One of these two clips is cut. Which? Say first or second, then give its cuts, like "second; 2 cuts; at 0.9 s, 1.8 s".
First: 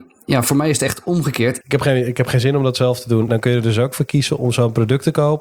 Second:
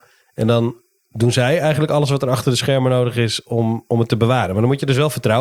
first; 2 cuts; at 1.6 s, 3.3 s